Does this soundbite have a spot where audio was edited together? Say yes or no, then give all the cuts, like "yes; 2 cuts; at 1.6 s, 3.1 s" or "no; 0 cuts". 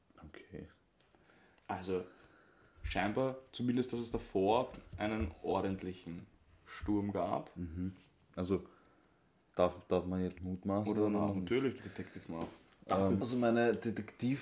yes; 3 cuts; at 10.4 s, 11.8 s, 13.2 s